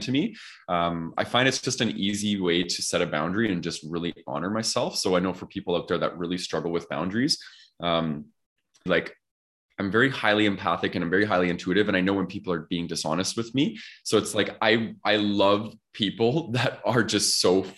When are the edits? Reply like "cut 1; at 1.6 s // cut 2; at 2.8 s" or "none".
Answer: cut 1; at 8.9 s